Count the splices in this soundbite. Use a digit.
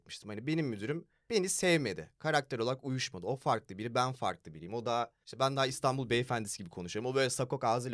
0